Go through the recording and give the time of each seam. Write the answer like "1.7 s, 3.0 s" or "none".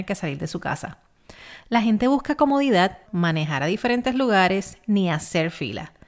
3.1 s

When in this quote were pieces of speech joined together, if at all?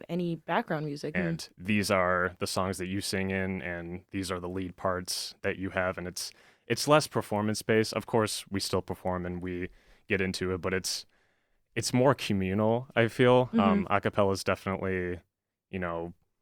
1.1 s

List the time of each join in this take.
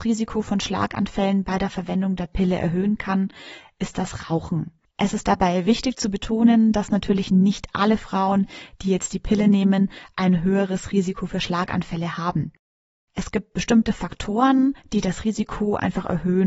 4.9 s

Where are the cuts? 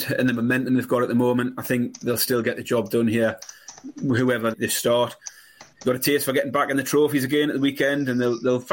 4.5 s, 5.7 s

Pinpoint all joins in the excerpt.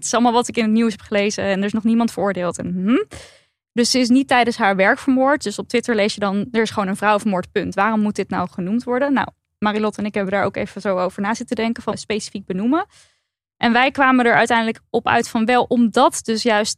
11.9 s

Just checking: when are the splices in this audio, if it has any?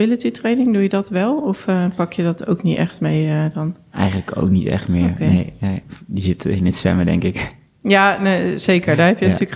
none

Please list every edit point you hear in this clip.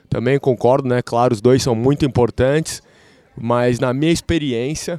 none

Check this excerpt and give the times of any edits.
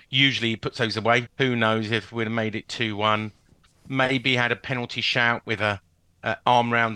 1.3 s

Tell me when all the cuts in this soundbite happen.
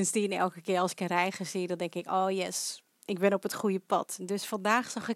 2.9 s

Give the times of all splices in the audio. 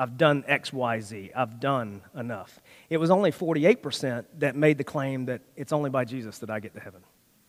none

